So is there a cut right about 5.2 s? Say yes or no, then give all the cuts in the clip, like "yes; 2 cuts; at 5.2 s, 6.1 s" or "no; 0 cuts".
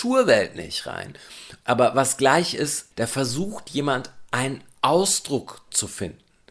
no; 2 cuts; at 1.6 s, 2.9 s